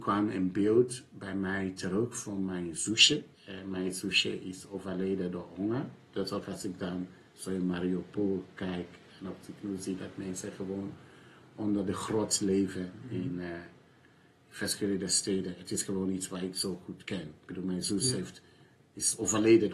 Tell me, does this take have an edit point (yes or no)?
yes